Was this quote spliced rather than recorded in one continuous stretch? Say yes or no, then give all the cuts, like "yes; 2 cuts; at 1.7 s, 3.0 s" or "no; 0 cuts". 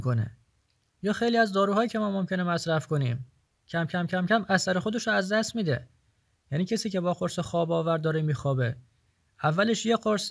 no; 0 cuts